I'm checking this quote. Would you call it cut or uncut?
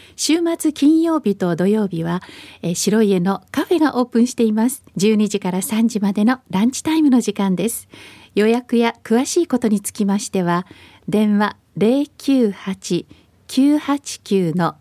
cut